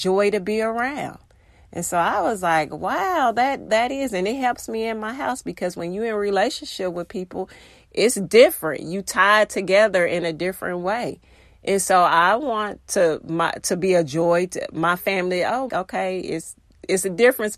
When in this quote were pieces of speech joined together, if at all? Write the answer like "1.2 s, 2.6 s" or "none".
3.7 s, 15.7 s